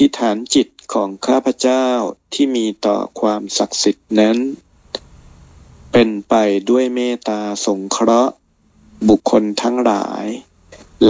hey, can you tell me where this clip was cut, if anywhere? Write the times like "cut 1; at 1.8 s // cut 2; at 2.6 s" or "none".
cut 1; at 9.2 s